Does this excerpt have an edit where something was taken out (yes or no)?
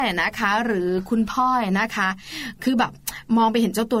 no